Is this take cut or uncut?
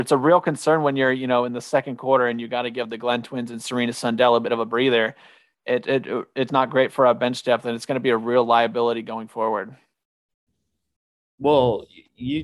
cut